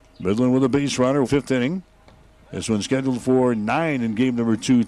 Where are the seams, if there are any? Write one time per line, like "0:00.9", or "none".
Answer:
0:01.2

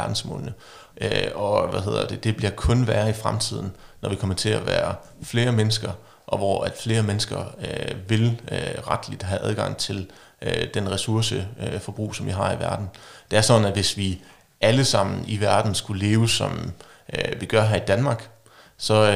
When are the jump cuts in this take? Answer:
0:00.9

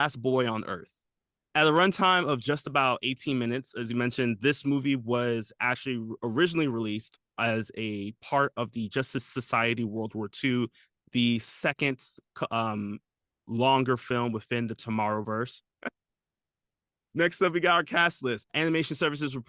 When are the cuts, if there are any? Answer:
0:15.8
0:18.4

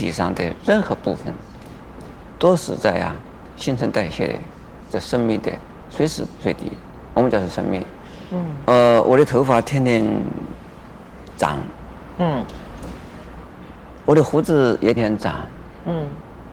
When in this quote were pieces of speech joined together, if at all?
0:08.7
0:15.0

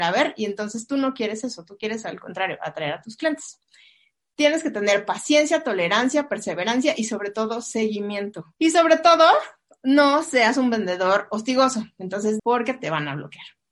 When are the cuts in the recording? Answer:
0:08.5
0:12.4

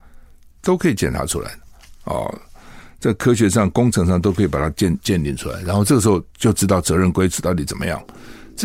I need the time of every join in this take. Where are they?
none

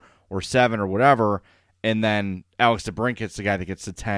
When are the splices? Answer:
none

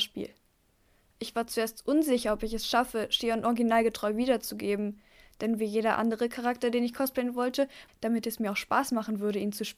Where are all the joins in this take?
0:07.9

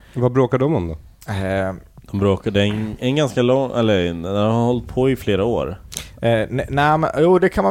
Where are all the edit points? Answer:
0:02.0

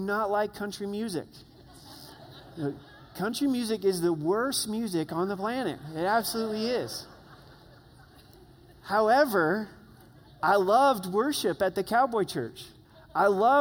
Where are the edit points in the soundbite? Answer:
none

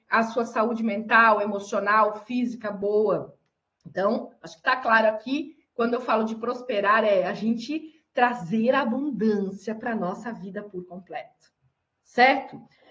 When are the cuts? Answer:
none

